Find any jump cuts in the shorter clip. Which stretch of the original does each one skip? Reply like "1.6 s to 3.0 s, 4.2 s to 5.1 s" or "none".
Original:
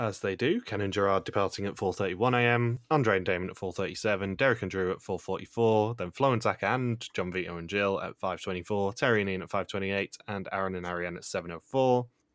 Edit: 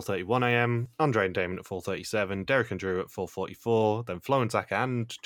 none